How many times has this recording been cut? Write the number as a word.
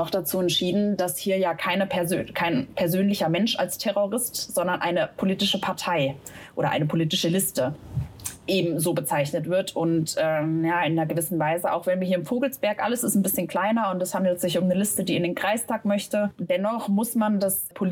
zero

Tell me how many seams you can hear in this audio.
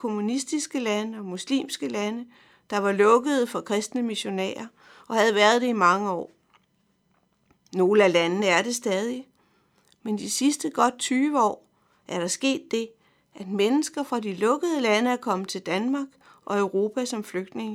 zero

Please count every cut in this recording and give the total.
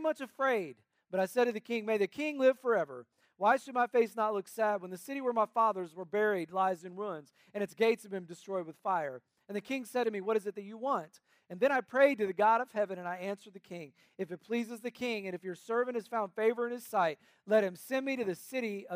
zero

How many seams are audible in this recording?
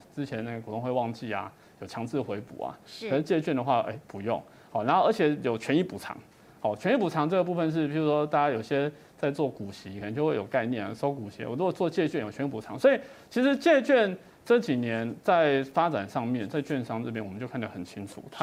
zero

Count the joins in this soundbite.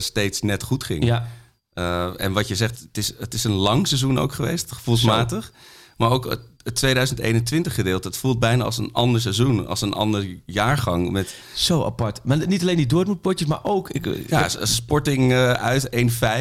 one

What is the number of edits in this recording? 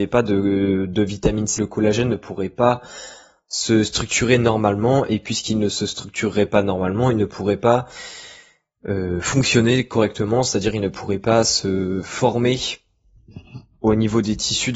one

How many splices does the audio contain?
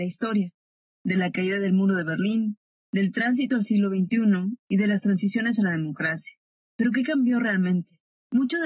zero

